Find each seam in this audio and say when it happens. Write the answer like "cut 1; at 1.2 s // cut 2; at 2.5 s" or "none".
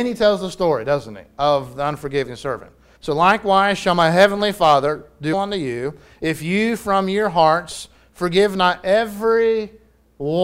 cut 1; at 3.0 s // cut 2; at 5.3 s

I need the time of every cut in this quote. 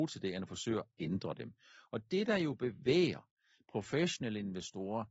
none

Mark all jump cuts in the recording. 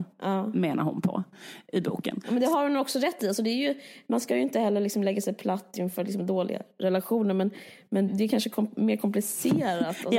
cut 1; at 8.1 s

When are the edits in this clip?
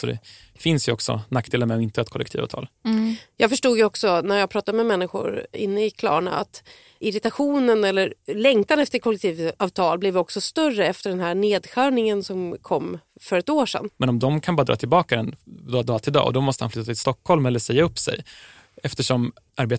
cut 1; at 13.9 s

